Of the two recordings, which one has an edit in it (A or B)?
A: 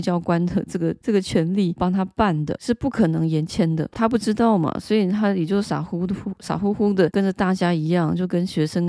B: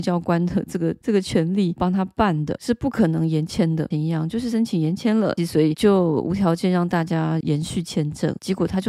B